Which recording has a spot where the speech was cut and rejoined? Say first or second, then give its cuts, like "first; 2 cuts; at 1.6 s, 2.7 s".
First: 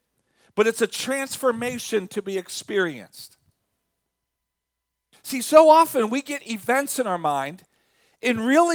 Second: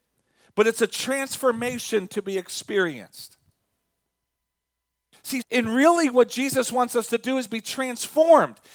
second; 1 cut; at 5.4 s